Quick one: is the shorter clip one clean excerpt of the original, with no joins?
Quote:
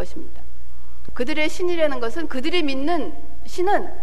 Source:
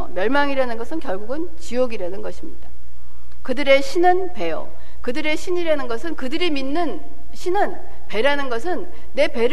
no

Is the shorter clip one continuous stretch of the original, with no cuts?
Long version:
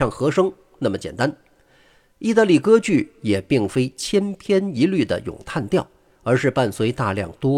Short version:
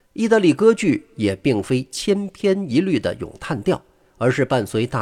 yes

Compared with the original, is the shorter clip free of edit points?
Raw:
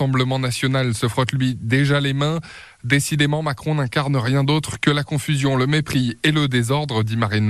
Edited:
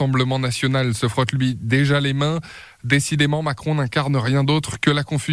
yes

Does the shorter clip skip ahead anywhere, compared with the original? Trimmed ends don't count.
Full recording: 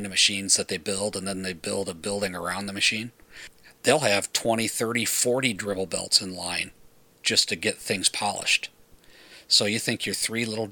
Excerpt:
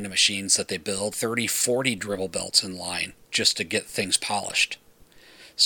yes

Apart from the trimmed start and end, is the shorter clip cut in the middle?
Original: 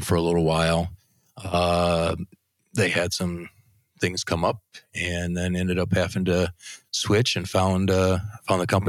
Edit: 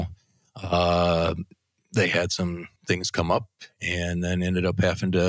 yes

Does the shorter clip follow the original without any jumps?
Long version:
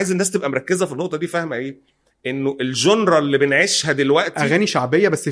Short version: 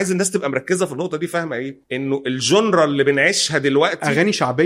no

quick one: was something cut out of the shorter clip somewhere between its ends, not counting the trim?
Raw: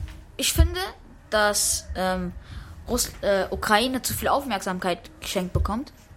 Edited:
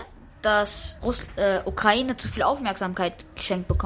yes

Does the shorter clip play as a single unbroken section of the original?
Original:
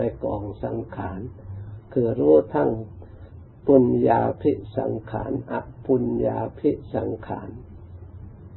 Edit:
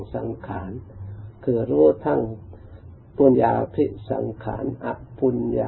no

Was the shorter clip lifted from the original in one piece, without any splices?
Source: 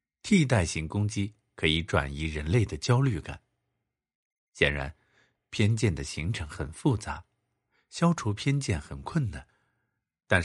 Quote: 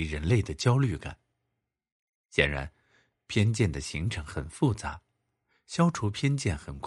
yes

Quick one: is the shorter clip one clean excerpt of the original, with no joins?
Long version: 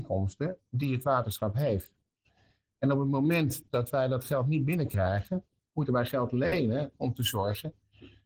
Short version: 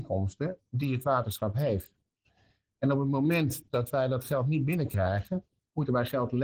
yes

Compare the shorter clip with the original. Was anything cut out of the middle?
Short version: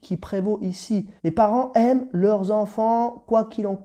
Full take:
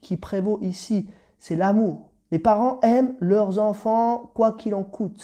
yes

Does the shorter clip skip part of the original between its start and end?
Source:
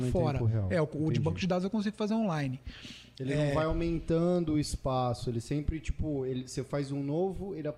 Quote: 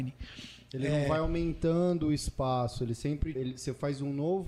yes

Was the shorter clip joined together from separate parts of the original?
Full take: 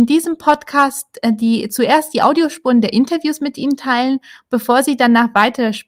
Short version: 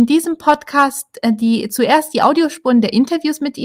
no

